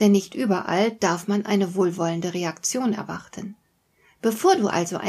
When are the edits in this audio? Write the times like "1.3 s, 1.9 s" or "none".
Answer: none